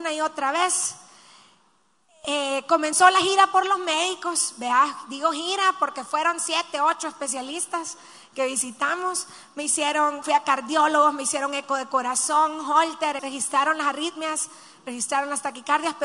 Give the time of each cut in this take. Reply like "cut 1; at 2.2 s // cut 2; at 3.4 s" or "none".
cut 1; at 10.2 s // cut 2; at 13.2 s